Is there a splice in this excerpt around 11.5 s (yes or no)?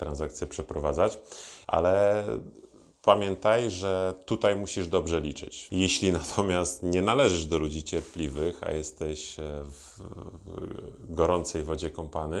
no